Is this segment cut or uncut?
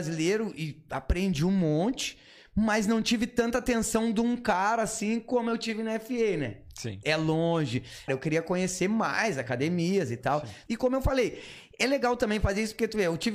cut